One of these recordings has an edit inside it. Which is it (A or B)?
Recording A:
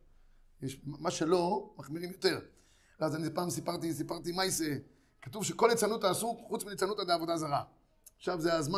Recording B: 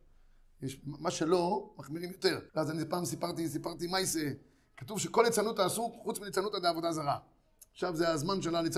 B